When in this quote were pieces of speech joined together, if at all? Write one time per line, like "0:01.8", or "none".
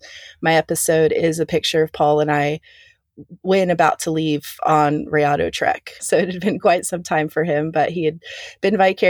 0:06.0